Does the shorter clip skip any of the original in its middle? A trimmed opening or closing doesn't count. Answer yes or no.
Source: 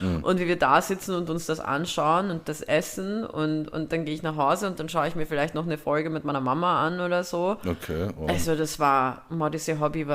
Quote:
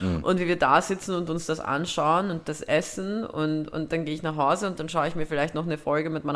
no